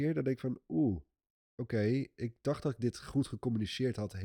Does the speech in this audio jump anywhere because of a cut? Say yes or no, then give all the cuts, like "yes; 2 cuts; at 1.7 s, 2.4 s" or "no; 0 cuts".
no; 0 cuts